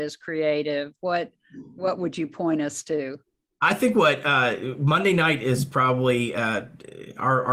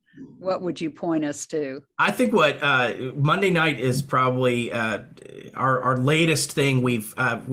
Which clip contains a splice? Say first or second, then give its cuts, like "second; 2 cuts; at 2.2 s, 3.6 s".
second; 1 cut; at 1.9 s